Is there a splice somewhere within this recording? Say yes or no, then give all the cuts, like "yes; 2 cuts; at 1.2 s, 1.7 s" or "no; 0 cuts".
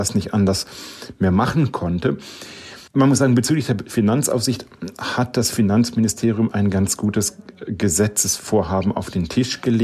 yes; 1 cut; at 2.9 s